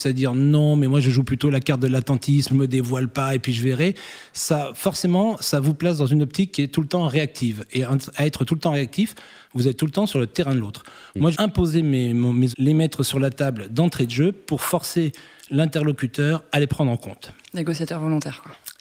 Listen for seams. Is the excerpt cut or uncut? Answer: cut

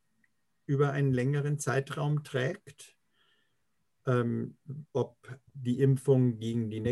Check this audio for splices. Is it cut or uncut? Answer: cut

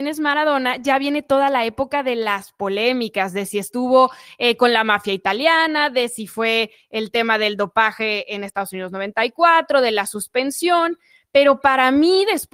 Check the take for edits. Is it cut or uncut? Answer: uncut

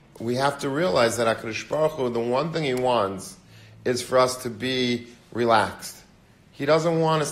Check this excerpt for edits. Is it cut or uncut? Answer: uncut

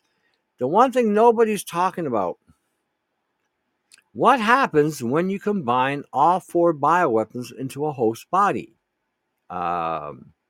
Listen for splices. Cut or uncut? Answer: uncut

